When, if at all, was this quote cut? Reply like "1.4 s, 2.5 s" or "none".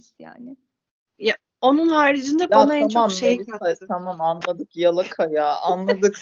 1.1 s